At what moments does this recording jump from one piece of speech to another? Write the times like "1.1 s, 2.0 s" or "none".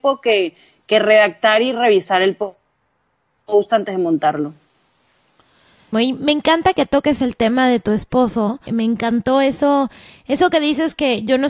5.9 s, 8.7 s